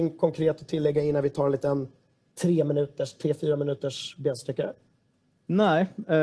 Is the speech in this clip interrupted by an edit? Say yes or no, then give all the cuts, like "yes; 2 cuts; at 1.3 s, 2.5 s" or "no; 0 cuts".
no; 0 cuts